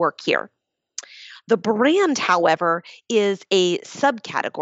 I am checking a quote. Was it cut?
no; 0 cuts

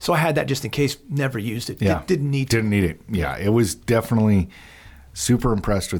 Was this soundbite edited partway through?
no; 0 cuts

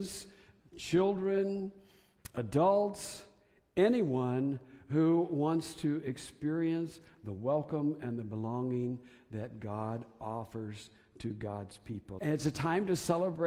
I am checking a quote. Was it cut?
yes; 1 cut; at 12.2 s

